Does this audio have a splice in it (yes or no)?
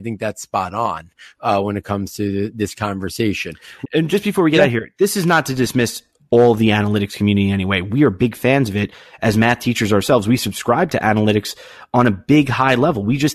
yes